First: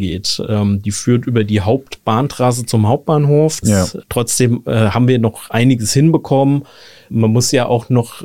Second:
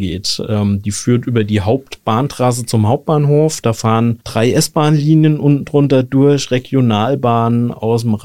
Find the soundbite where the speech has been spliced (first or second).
first